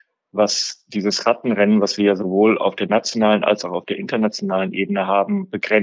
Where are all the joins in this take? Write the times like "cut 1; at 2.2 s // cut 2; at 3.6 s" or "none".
none